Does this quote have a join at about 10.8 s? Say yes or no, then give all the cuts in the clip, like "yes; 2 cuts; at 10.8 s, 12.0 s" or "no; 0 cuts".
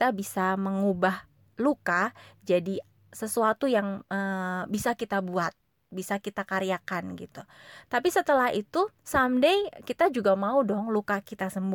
no; 1 cut; at 9.0 s